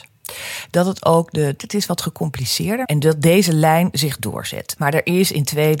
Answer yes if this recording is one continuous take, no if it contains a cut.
no